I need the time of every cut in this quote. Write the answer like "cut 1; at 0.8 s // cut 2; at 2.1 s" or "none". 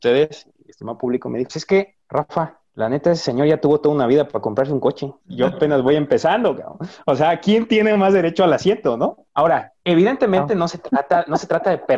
cut 1; at 1.5 s

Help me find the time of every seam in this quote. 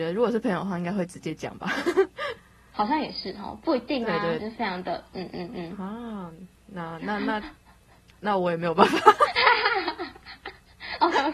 cut 1; at 4.4 s

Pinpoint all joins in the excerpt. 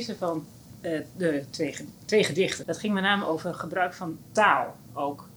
cut 1; at 2.6 s

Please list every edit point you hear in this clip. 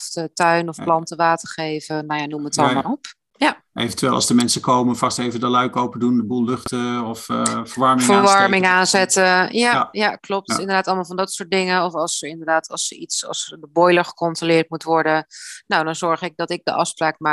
none

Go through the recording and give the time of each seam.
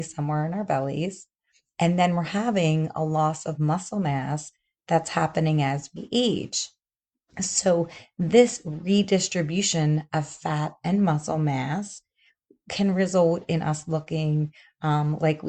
none

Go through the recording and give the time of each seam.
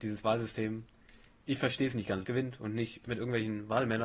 cut 1; at 2.2 s

